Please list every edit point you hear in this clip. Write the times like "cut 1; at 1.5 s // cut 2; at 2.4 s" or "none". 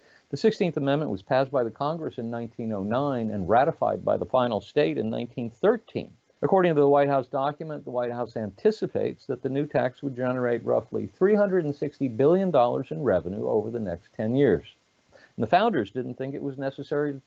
cut 1; at 6.4 s // cut 2; at 15.1 s